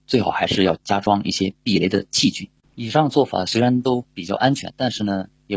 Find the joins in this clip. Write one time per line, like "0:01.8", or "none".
0:02.6